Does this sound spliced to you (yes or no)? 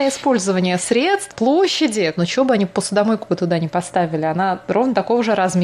yes